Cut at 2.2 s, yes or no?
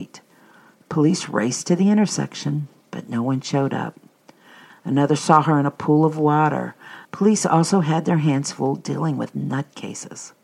no